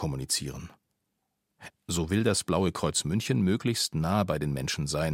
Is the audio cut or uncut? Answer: cut